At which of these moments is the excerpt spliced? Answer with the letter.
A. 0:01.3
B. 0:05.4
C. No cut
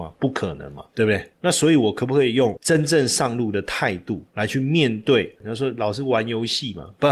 C